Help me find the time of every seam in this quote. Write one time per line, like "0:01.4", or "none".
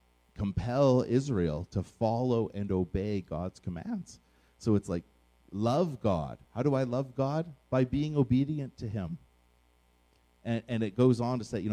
none